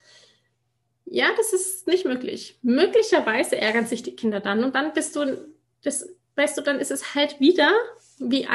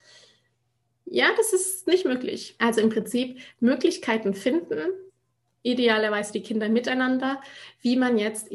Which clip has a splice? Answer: second; 1 cut; at 2.6 s

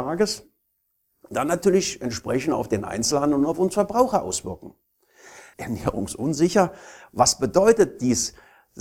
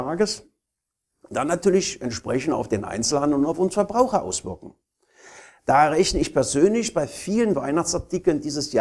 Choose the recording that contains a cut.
first; 1 cut; at 5.5 s

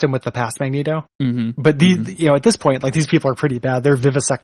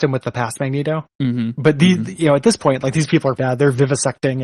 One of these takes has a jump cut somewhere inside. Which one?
second; 1 cut; at 3.4 s

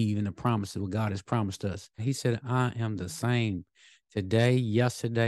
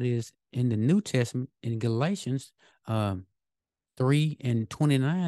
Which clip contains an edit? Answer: first; 1 cut; at 2.0 s

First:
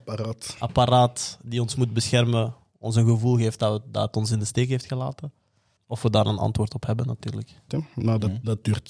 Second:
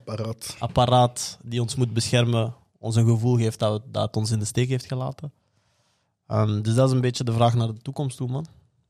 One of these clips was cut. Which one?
first; 2 cuts; at 5.8 s, 7.7 s

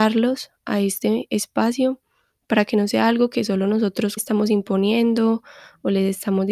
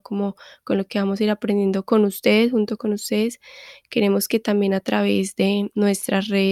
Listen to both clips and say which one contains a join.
first; 1 cut; at 4.2 s

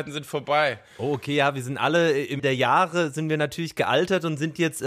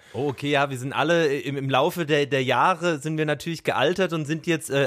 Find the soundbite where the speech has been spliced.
first; 1 cut; at 2.4 s

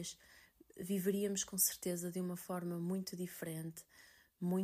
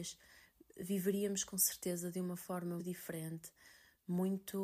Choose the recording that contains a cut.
second; 1 cut; at 2.8 s

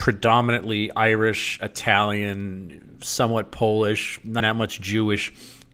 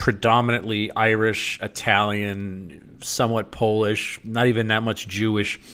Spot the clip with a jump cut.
first; 1 cut; at 4.4 s

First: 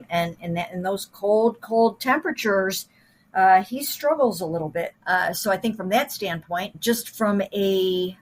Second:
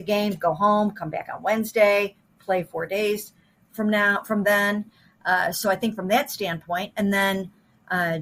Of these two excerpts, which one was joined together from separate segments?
first; 2 cuts; at 4.9 s, 6.7 s

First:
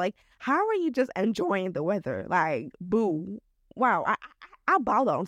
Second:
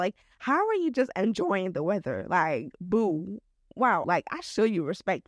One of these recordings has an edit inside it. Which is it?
second; 1 cut; at 4.0 s

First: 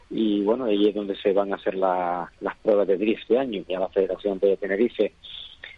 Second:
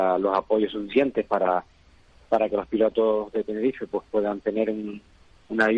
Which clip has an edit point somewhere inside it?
first; 1 cut; at 3.7 s

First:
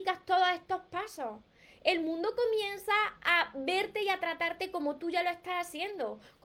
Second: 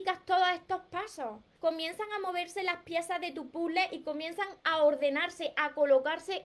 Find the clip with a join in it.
second; 1 cut; at 1.5 s

